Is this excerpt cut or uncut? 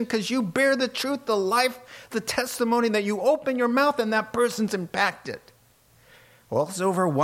cut